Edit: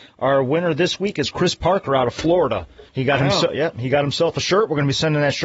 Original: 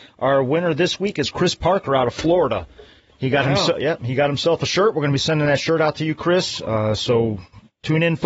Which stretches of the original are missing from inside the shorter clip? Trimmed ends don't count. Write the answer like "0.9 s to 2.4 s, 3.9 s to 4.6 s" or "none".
2.9 s to 3.1 s